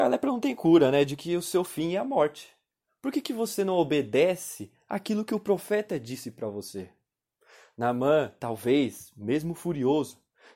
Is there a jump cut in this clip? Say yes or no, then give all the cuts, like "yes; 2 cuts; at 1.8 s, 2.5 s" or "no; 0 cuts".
no; 0 cuts